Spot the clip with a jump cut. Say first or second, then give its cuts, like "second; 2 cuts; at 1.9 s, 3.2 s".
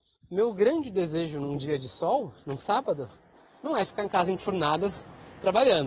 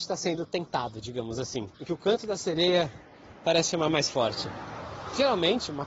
second; 1 cut; at 1.7 s